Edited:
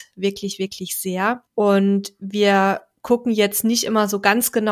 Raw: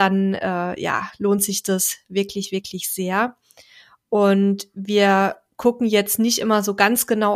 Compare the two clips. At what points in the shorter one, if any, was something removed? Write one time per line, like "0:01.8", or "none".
0:01.5

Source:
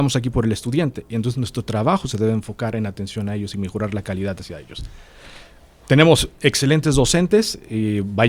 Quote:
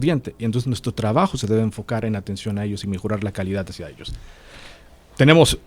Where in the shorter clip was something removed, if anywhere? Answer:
none

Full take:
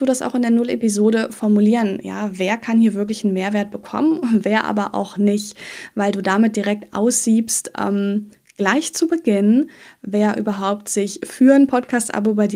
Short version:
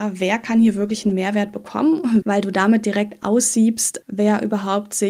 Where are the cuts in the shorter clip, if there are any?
0:02.2
0:04.0

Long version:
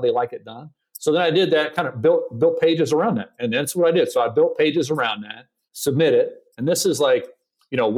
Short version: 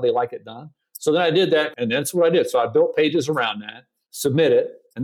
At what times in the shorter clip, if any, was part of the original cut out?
0:01.7

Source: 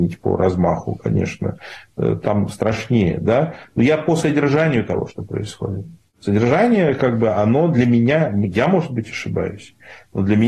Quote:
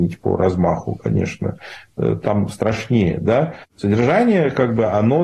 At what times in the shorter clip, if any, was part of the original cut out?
0:03.6

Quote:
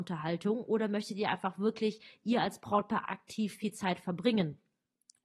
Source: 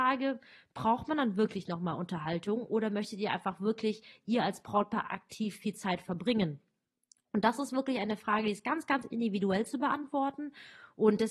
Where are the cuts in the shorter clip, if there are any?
none

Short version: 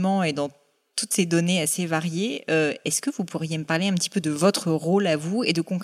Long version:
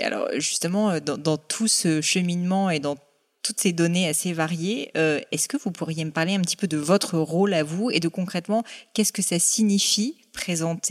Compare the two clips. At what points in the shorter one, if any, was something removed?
none

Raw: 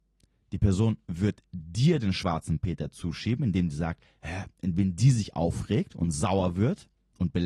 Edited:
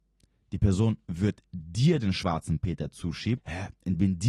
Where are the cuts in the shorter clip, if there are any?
0:03.4

